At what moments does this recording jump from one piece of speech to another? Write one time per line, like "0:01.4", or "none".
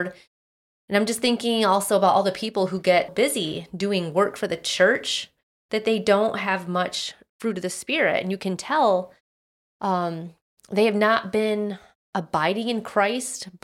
0:03.1

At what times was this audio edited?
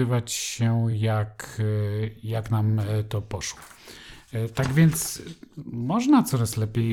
none

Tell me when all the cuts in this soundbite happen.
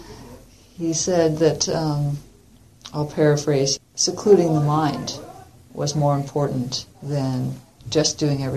0:03.8
0:06.9

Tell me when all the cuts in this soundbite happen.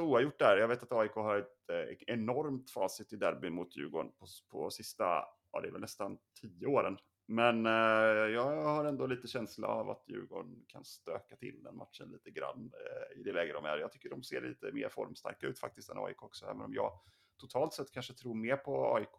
none

